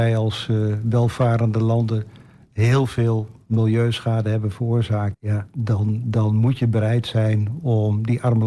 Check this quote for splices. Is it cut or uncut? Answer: cut